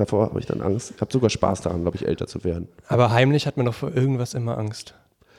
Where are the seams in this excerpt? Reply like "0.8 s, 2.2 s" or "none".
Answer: 1.0 s